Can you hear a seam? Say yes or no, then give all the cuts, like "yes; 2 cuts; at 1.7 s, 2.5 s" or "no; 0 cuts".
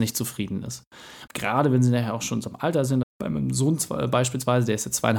yes; 2 cuts; at 1.3 s, 3.0 s